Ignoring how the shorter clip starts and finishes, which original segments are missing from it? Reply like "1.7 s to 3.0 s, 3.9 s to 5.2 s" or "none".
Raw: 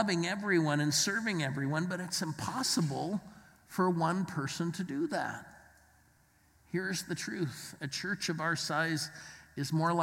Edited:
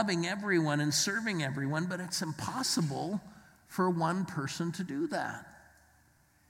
none